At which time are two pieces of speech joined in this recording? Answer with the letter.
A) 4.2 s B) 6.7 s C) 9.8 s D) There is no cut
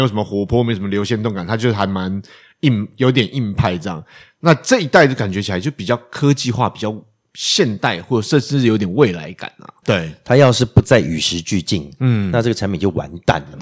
C